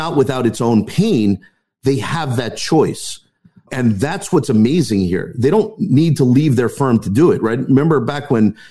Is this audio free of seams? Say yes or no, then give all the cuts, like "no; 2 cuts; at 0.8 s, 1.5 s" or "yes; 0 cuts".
yes; 0 cuts